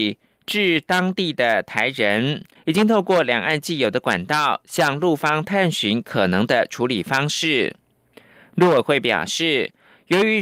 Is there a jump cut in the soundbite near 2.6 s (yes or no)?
yes